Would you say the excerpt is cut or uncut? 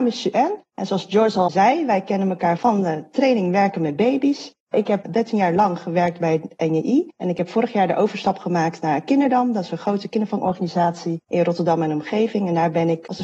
uncut